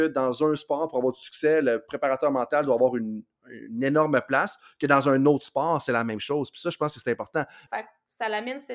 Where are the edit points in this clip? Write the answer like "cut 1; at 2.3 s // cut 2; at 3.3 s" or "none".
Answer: cut 1; at 7.7 s